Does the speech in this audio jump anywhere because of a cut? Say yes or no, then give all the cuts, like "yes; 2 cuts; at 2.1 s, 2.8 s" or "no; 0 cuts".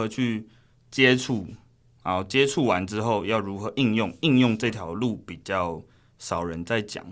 no; 0 cuts